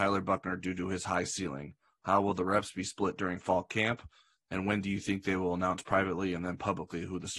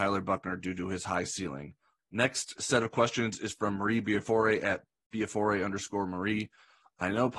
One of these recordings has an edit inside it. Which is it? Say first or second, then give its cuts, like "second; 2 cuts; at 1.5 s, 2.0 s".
second; 1 cut; at 2.0 s